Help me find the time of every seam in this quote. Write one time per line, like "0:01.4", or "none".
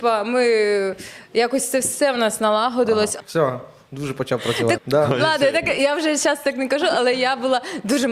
0:03.2
0:04.8